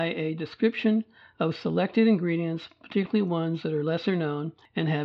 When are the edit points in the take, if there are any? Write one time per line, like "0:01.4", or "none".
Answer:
none